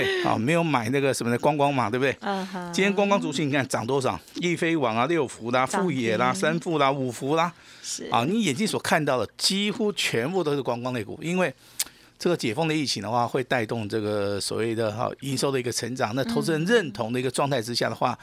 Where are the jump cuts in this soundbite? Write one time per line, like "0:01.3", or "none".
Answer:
none